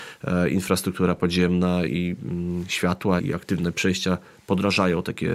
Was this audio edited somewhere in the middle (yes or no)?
yes